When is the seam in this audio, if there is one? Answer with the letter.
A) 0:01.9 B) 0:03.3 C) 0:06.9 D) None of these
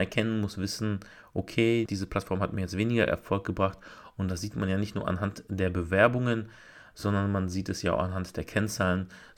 A